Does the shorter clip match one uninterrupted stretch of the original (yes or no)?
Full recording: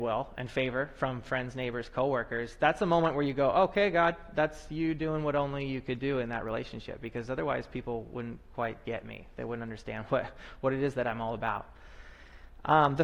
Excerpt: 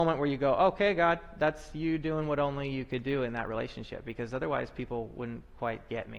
yes